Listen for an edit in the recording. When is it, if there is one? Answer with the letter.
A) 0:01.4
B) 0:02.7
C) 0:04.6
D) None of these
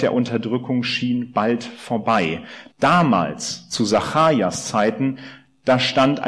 B